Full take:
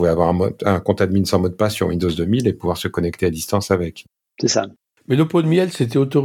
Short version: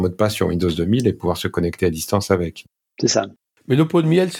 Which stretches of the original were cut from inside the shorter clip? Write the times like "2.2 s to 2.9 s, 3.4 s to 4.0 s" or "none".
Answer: none